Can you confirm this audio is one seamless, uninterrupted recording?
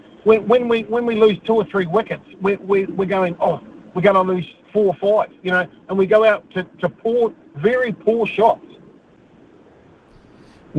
yes; 0 cuts

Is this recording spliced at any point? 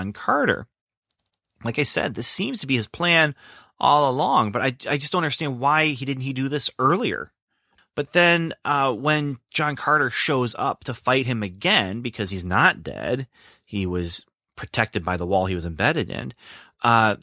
yes; 1 cut; at 7.8 s

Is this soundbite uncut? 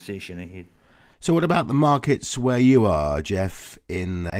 yes; 0 cuts

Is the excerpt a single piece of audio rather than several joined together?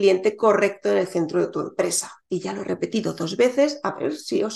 yes; 0 cuts

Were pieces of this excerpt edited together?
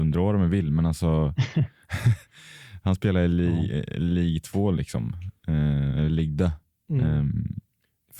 no; 0 cuts

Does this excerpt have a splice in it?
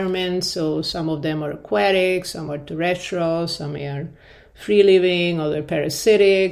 no; 0 cuts

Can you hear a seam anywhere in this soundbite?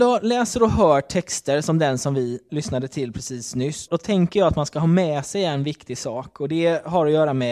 yes; 2 cuts; at 2.5 s, 3.9 s

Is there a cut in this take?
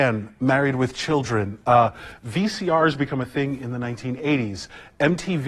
no; 0 cuts

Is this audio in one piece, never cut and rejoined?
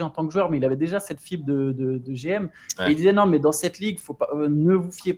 yes; 0 cuts

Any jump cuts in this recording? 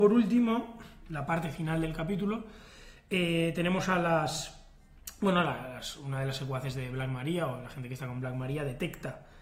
no; 0 cuts

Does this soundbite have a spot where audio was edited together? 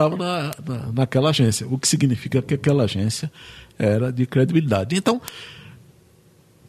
no; 0 cuts

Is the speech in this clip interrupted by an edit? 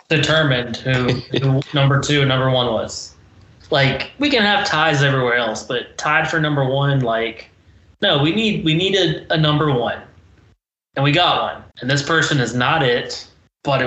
yes; 2 cuts; at 3.6 s, 11.7 s

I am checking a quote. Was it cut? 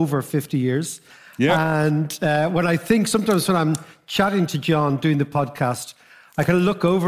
no; 0 cuts

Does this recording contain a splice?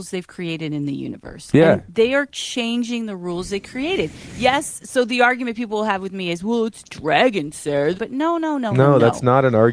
yes; 1 cut; at 7.9 s

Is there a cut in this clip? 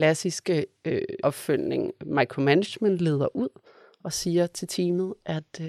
yes; 1 cut; at 1.2 s

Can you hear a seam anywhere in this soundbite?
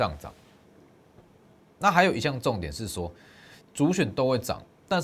yes; 2 cuts; at 1.6 s, 3.6 s

